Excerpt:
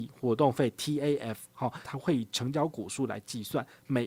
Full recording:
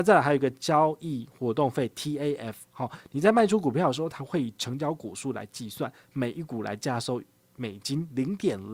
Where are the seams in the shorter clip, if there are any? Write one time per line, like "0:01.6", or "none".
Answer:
0:01.8